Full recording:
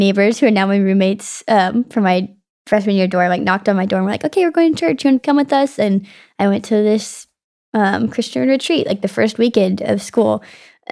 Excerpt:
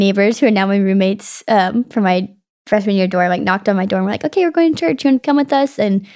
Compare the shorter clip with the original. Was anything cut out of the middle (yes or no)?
no